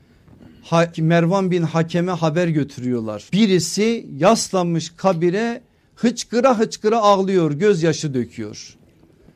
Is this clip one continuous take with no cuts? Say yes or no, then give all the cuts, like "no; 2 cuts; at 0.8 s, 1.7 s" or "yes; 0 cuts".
no; 2 cuts; at 0.9 s, 3.3 s